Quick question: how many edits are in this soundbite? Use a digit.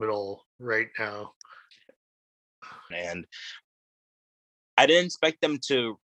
1